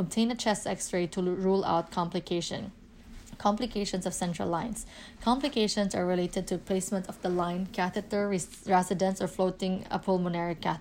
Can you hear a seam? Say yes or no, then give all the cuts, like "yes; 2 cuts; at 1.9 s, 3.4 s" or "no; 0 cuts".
no; 0 cuts